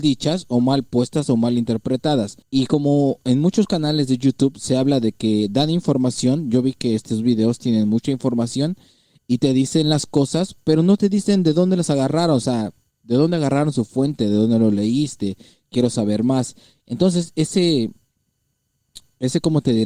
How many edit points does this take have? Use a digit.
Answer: 2